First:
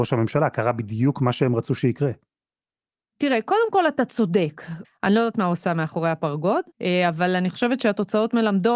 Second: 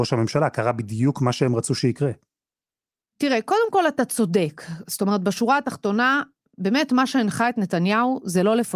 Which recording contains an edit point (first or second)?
first